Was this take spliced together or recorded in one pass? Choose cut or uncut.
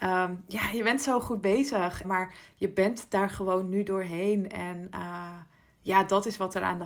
cut